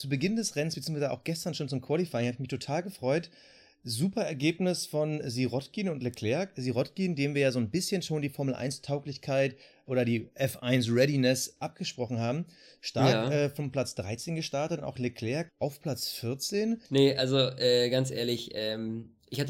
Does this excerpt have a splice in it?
yes; 2 cuts; at 15.5 s, 16.8 s

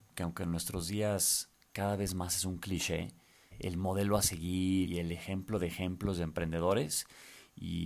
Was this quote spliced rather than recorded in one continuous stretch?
yes; 2 cuts; at 3.5 s, 4.9 s

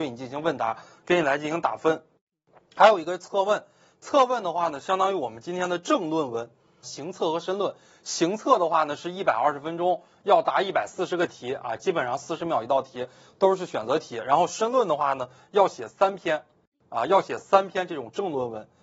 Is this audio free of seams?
no; 1 cut; at 6.8 s

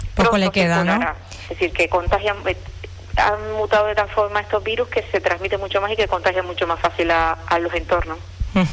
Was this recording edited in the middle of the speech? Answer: yes; 1 cut; at 1.4 s

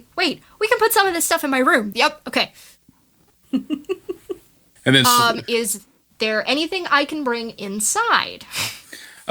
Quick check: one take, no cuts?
no; 1 cut; at 1.9 s

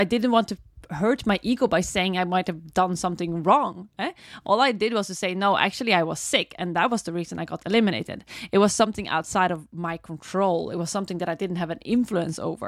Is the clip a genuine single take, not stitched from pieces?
yes; 0 cuts

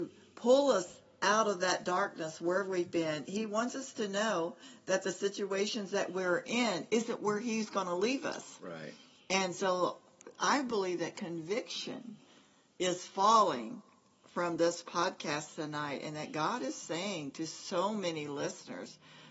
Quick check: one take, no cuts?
yes; 0 cuts

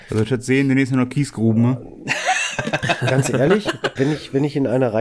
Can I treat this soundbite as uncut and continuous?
no; 1 cut; at 4.0 s

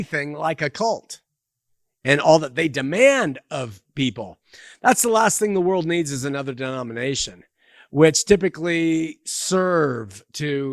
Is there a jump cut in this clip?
no; 0 cuts

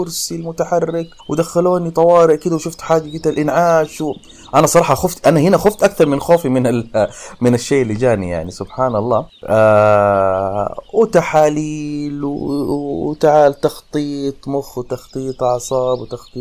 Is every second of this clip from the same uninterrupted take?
no; 1 cut; at 1.2 s

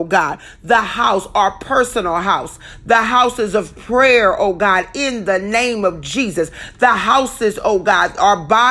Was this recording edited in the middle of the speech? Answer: no; 0 cuts

